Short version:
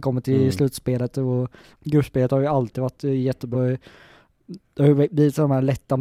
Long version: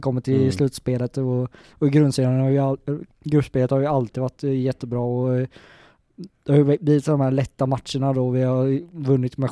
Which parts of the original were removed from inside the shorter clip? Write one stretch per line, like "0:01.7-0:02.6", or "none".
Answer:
0:01.7-0:03.1
0:04.9-0:05.2